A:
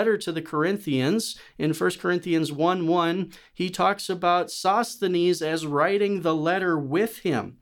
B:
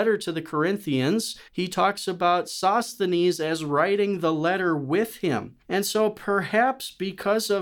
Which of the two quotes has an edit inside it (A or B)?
B